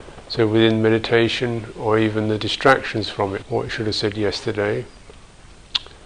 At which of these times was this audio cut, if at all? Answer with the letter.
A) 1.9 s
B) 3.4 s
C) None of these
B